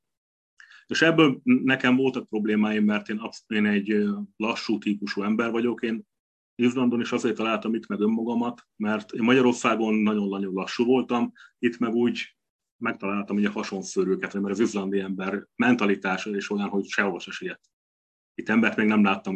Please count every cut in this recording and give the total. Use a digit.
2